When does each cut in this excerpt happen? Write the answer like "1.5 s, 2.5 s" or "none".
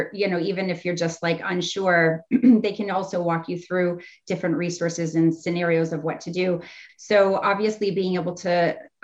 6.9 s